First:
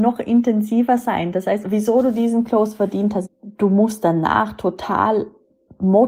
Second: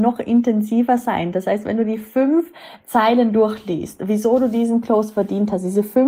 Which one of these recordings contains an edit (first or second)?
first